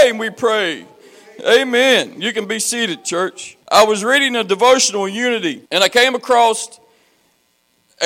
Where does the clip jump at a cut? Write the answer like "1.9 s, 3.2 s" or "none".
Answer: 3.6 s, 5.7 s